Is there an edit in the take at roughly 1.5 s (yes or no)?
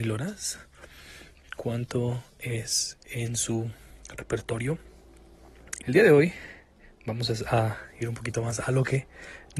no